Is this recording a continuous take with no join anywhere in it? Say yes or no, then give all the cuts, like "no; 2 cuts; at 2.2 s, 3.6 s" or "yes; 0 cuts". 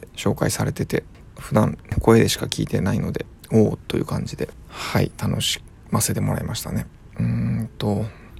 yes; 0 cuts